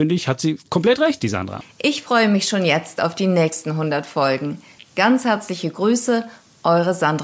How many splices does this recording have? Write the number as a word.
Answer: two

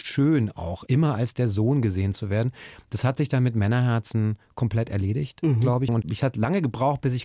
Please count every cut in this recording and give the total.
one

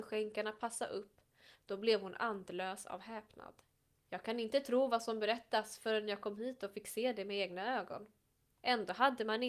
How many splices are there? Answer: two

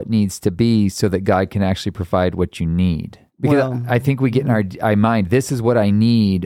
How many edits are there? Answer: one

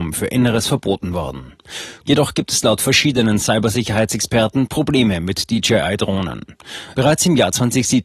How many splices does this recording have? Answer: two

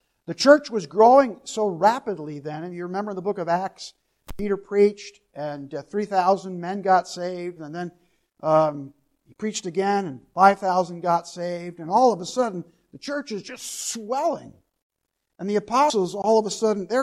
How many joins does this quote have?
one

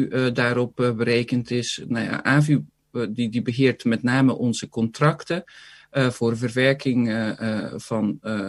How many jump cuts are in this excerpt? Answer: zero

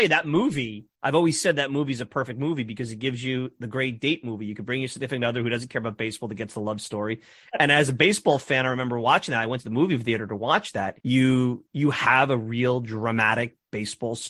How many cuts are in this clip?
two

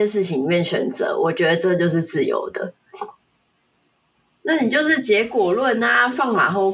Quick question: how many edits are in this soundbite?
one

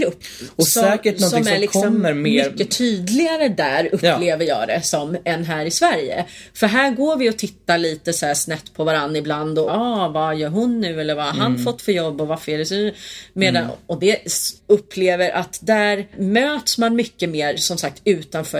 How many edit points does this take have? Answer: two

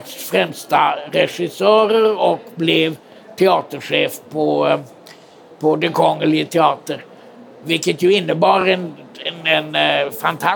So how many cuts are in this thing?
zero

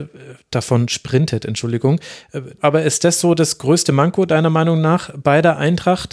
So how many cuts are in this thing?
one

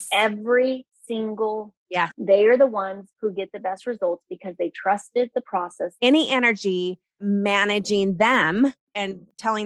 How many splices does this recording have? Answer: two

